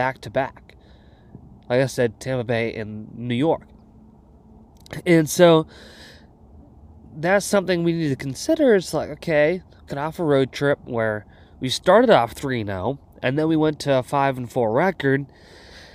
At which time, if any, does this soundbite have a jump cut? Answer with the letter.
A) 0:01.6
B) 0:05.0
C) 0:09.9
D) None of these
C